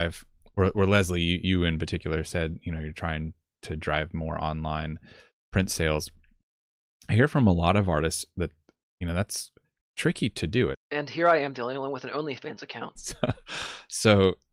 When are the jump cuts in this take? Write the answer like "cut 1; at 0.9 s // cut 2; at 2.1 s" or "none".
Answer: cut 1; at 10.7 s // cut 2; at 13.0 s